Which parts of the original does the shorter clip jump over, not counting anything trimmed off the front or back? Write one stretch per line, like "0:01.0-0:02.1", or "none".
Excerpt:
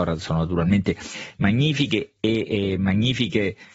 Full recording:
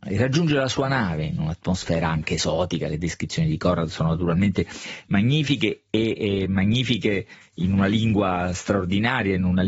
none